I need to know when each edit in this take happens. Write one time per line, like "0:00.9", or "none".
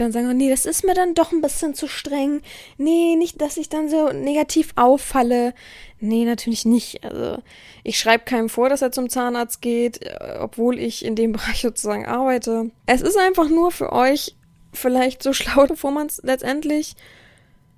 0:03.3
0:12.9
0:15.7